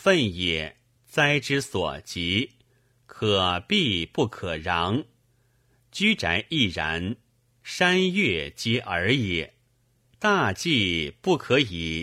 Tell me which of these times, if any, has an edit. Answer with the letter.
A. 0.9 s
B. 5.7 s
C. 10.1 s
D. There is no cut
C